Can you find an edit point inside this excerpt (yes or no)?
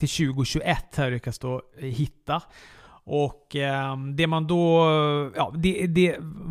no